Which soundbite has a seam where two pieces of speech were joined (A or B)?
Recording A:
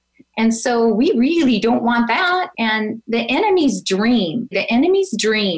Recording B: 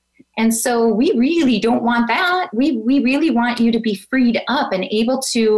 A